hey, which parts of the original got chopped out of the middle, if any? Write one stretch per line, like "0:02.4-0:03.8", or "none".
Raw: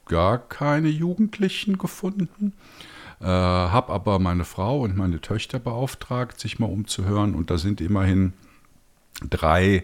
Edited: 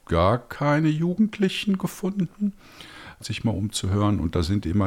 0:03.2-0:06.3